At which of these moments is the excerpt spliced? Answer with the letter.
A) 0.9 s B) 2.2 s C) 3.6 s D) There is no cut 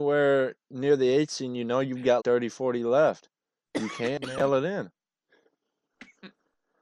B